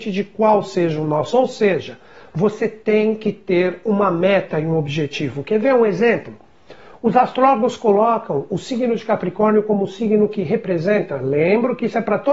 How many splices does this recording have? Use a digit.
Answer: 0